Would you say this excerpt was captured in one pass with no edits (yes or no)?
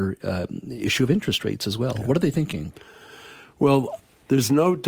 yes